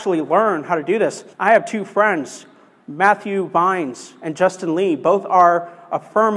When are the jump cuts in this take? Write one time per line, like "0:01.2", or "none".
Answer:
0:01.3

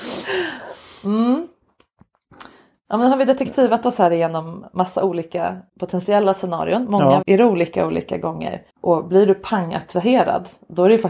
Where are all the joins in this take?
0:05.7
0:07.2
0:08.7

